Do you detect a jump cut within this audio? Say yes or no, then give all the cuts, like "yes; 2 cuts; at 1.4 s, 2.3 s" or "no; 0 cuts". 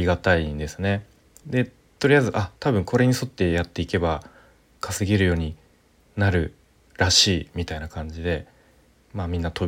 no; 0 cuts